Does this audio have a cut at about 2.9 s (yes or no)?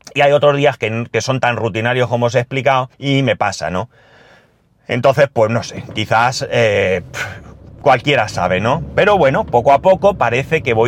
yes